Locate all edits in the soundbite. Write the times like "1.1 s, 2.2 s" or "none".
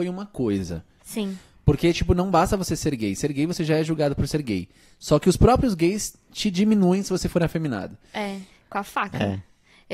1.0 s, 8.5 s